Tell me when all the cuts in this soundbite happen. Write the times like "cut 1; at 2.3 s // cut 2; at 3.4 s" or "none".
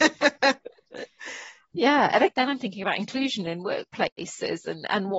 cut 1; at 2.3 s